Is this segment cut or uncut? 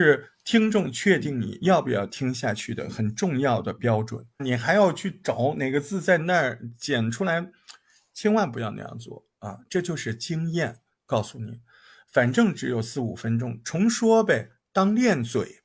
cut